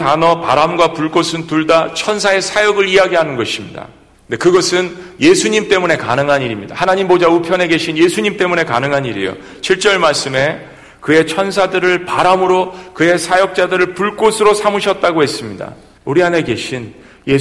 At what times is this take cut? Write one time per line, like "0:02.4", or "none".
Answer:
0:04.1
0:16.0